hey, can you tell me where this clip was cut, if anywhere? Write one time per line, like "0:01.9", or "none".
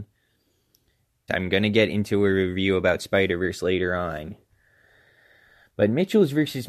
0:01.3

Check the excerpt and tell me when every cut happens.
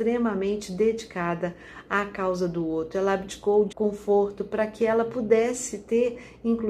0:03.7

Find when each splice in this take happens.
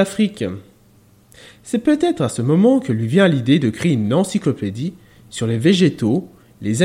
none

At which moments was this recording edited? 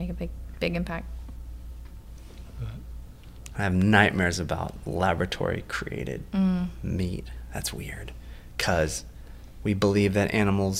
0:03.5

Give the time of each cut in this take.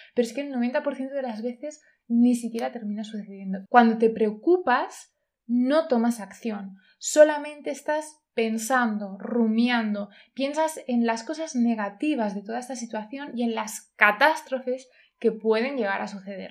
0:03.7

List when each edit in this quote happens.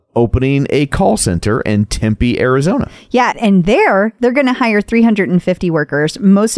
0:03.3

